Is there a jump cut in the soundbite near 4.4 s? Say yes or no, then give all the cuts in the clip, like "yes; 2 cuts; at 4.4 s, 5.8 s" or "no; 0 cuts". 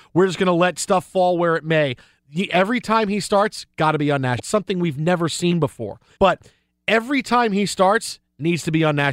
yes; 2 cuts; at 4.4 s, 6.2 s